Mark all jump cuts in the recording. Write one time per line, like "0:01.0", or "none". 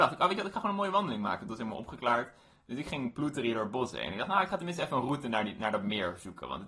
none